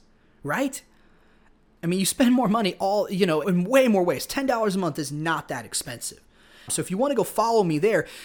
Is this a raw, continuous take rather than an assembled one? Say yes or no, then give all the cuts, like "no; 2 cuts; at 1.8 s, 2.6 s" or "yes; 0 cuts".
no; 2 cuts; at 3.4 s, 6.7 s